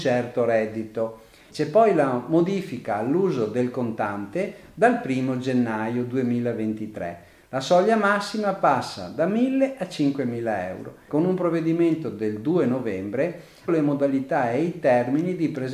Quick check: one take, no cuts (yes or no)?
no